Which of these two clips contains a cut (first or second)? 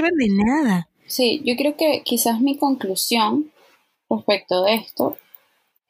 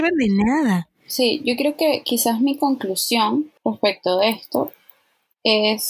second